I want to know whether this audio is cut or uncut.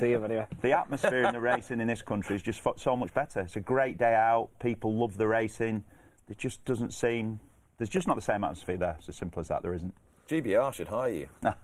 uncut